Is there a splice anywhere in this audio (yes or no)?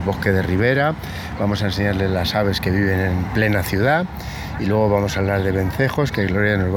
no